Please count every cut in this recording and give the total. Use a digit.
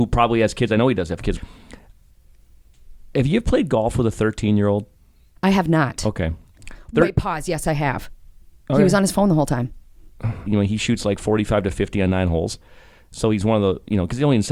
2